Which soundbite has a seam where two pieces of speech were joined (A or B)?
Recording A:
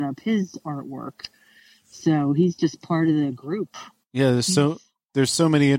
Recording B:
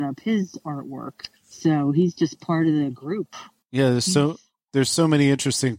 B